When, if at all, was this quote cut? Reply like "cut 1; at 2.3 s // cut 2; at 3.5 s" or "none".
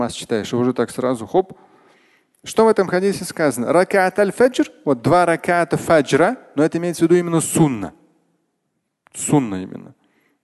none